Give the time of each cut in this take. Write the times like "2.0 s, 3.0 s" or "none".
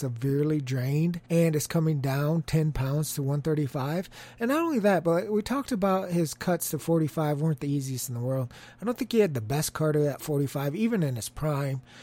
1.2 s